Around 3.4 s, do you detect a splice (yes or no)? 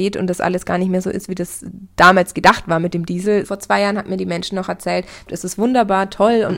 yes